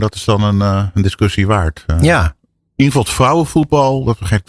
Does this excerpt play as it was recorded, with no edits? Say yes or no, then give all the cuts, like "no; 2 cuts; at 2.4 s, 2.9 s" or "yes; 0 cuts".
yes; 0 cuts